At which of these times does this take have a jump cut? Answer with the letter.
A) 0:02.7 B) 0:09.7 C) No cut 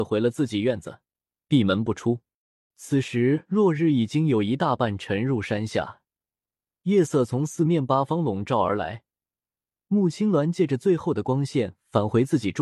A